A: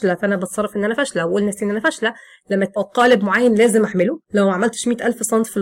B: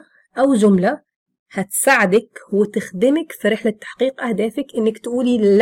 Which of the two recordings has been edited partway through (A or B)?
A